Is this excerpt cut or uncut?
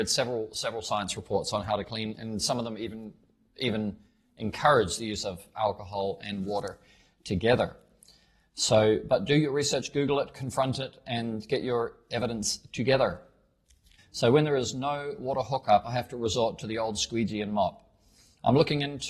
cut